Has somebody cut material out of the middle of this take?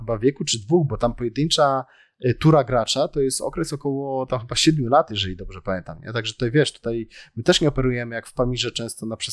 no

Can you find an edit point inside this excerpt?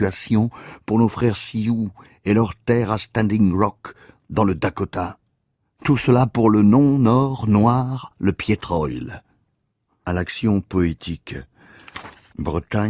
no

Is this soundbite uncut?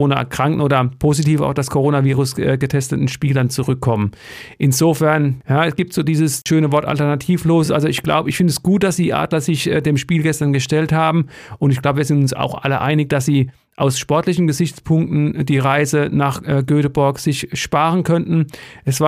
yes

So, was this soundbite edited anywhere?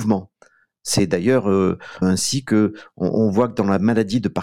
yes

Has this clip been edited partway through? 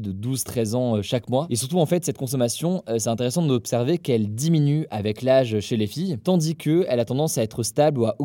no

